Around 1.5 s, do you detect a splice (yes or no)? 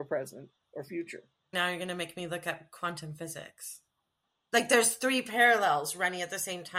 yes